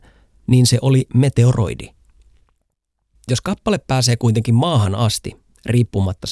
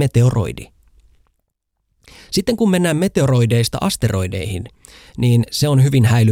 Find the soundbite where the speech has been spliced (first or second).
first